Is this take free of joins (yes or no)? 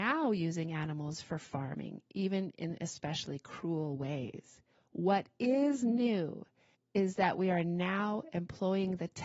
yes